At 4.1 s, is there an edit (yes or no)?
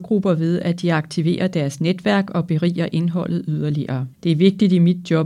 yes